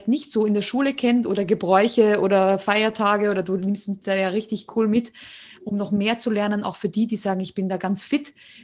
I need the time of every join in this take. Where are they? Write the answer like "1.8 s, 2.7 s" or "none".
none